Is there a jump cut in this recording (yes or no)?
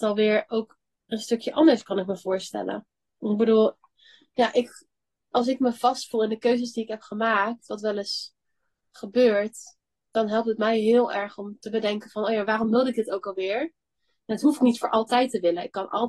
no